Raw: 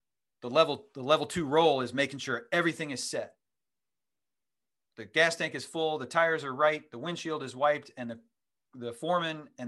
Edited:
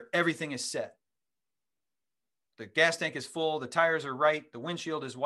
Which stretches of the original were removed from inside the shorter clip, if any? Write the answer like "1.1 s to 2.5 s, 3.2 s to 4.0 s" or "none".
none